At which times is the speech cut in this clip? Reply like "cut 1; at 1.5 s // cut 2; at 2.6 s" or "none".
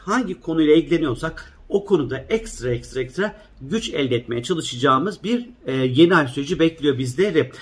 cut 1; at 2.9 s